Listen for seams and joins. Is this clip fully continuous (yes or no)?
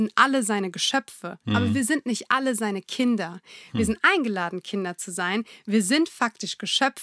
yes